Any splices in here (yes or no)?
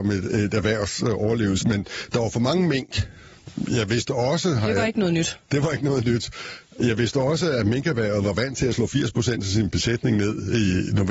yes